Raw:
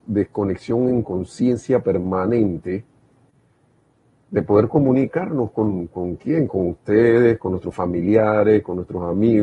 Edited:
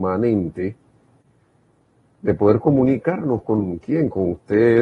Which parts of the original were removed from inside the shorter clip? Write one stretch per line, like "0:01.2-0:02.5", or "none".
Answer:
0:05.9-0:06.2